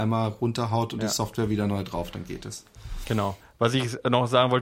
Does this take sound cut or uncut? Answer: uncut